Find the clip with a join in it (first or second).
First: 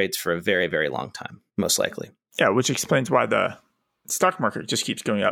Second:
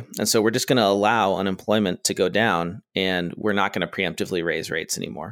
first